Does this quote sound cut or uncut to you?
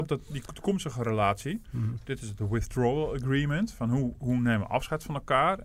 cut